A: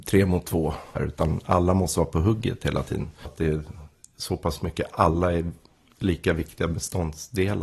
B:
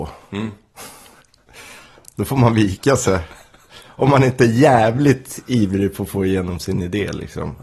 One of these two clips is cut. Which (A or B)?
A